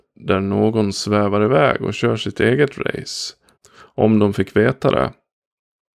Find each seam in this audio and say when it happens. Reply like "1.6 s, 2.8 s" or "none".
3.6 s